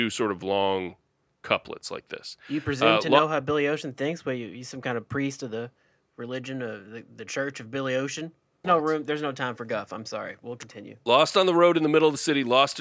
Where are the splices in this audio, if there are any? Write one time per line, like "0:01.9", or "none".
0:08.6